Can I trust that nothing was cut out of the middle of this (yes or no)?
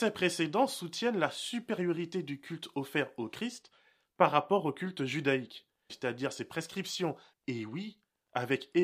no